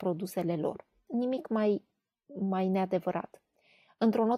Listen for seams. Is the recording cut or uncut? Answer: uncut